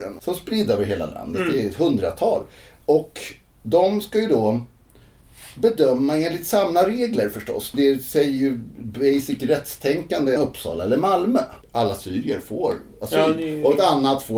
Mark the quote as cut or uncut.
cut